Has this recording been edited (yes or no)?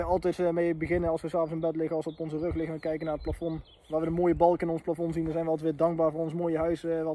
no